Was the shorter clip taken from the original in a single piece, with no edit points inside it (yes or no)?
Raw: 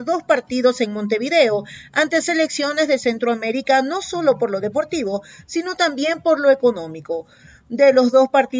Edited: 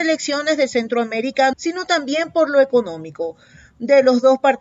no